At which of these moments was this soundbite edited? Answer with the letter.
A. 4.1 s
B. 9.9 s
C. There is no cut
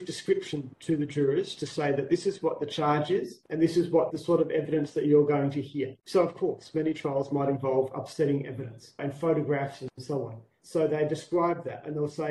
A